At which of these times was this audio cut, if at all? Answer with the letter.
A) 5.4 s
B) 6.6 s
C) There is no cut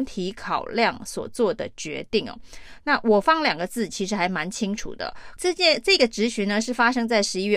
A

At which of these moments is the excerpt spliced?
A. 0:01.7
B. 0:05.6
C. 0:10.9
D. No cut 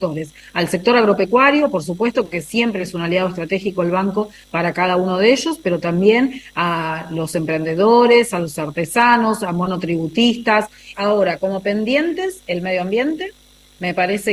C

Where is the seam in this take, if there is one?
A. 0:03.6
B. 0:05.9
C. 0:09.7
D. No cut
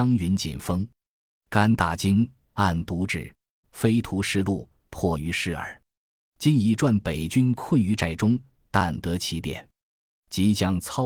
A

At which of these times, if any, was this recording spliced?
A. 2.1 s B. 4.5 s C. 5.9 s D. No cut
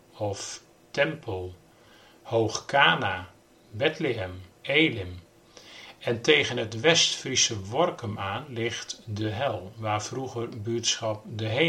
B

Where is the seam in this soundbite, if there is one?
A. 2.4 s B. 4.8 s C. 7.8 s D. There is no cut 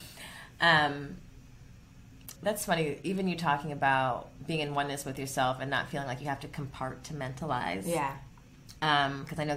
A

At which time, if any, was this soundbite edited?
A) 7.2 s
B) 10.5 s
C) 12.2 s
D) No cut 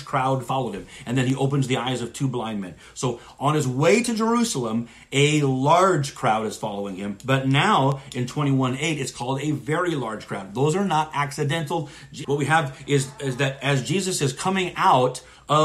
C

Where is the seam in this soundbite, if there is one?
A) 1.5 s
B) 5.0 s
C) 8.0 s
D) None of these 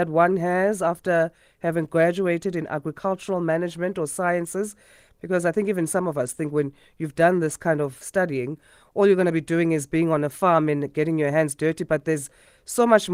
C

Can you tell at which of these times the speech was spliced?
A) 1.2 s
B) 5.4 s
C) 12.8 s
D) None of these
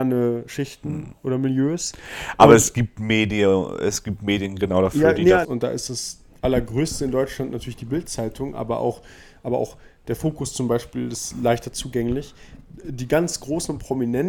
B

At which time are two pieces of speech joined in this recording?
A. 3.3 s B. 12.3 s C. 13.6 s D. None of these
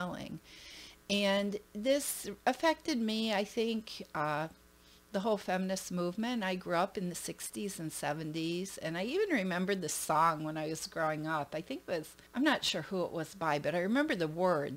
B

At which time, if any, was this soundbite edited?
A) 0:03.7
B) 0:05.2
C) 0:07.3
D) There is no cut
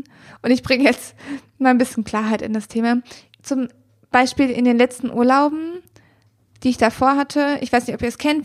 D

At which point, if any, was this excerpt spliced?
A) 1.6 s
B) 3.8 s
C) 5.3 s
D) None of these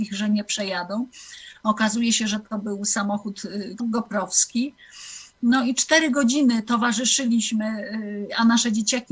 B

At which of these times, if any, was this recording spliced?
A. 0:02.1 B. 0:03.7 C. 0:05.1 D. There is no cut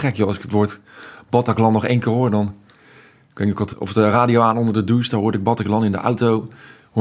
B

